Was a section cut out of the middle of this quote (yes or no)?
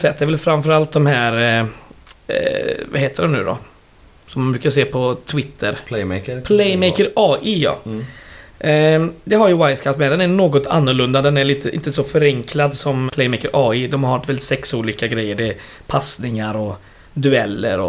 yes